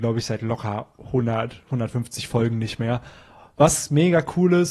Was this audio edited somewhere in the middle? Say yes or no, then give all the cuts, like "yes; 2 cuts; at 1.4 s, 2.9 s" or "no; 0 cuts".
no; 0 cuts